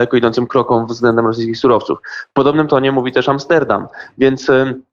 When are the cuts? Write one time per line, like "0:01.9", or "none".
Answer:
none